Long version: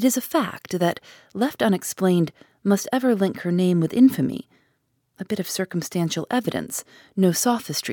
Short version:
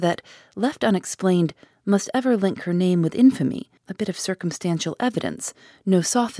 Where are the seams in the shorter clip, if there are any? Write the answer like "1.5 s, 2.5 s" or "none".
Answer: 3.8 s